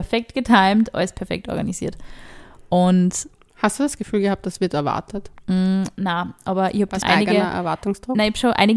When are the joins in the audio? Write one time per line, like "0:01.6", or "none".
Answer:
0:07.0